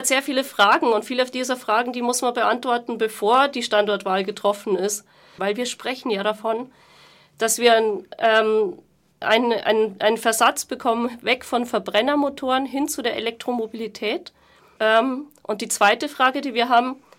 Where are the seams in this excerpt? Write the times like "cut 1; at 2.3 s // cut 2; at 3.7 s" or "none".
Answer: cut 1; at 5.4 s // cut 2; at 9.2 s // cut 3; at 14.8 s